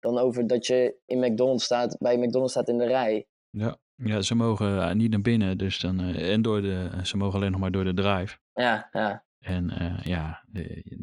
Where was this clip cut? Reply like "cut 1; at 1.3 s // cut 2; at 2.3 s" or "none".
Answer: none